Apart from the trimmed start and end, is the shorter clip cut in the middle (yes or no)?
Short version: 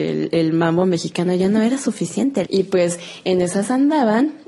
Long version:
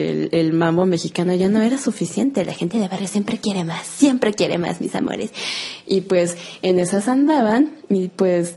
yes